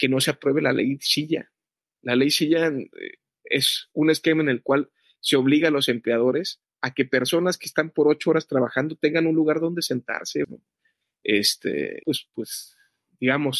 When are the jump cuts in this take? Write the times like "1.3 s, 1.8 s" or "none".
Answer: 10.4 s, 12.0 s

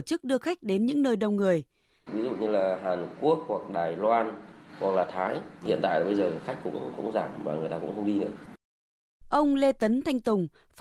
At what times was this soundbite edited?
2.1 s

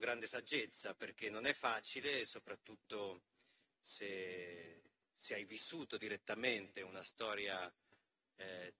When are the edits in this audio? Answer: none

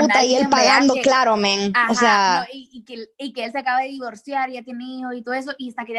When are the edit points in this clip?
none

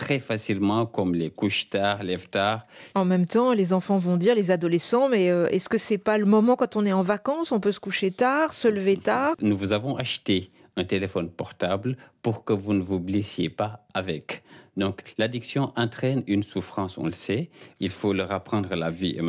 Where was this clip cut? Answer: 2.9 s, 9.3 s, 17.8 s

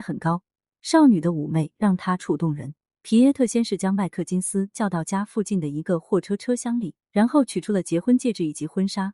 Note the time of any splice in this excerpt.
2.2 s, 7.0 s

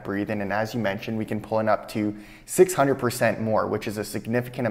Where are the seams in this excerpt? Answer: none

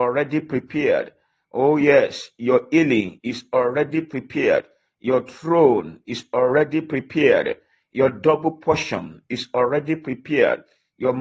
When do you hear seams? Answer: none

